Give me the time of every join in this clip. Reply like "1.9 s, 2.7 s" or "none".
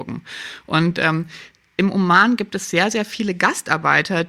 none